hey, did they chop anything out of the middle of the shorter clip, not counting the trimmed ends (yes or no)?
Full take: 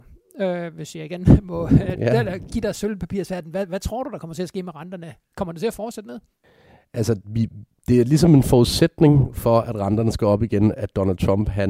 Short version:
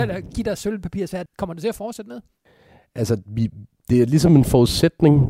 yes